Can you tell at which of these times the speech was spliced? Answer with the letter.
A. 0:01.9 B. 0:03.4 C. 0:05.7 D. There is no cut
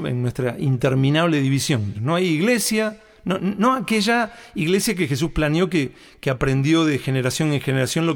A